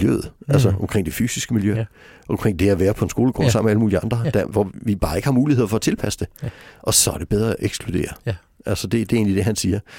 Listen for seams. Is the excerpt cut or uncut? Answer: uncut